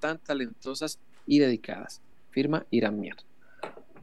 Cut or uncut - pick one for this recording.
cut